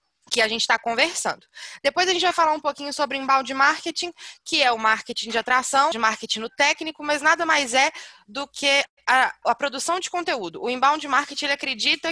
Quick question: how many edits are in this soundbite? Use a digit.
2